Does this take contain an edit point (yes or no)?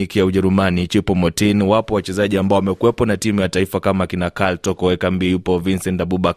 no